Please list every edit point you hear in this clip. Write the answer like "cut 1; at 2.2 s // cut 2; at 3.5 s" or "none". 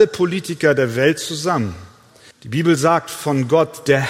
cut 1; at 2.3 s

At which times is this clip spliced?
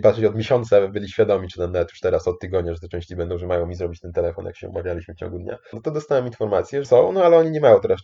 cut 1; at 5.7 s // cut 2; at 6.8 s

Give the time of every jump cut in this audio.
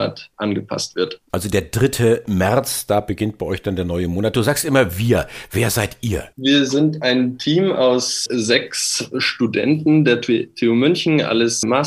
cut 1; at 6.3 s

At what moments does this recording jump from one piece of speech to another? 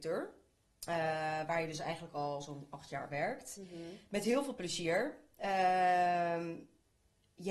none

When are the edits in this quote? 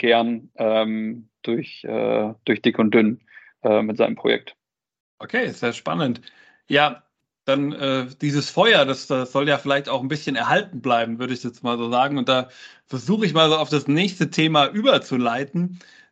none

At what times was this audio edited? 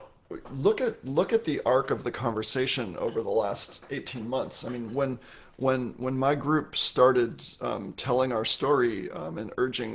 none

